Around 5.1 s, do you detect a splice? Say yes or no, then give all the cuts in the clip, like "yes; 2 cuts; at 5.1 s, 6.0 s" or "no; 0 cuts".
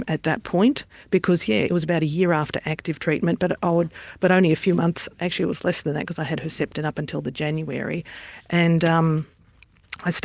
no; 1 cut; at 1.7 s